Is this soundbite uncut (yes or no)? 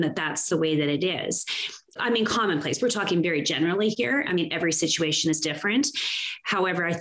yes